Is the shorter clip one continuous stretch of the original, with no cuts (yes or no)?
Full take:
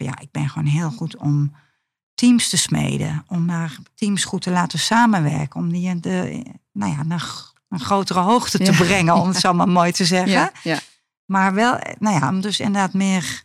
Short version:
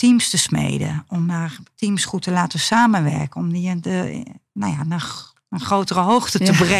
yes